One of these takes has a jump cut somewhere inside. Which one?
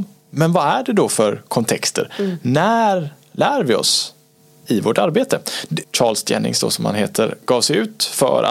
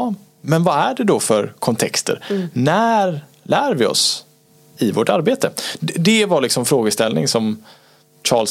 first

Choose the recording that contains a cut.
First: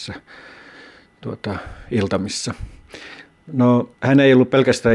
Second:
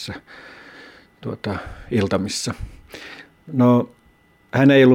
first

